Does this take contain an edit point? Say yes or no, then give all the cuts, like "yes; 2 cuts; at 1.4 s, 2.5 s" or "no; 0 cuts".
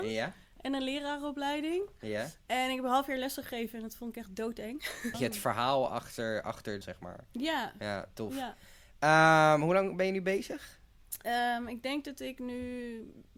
yes; 2 cuts; at 5.1 s, 6.8 s